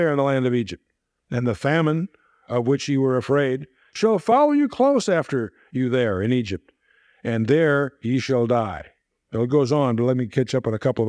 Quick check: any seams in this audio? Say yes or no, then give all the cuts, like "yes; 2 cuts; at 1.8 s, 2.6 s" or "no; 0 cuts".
no; 0 cuts